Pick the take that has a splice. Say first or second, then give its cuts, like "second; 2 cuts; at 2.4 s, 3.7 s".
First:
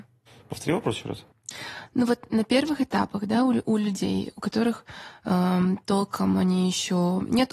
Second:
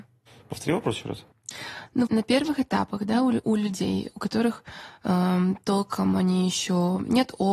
second; 1 cut; at 2.1 s